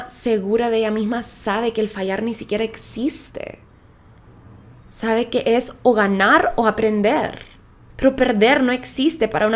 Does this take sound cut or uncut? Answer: cut